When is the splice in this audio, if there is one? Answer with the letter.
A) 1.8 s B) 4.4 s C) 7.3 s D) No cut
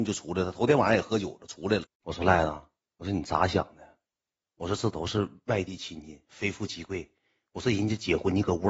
A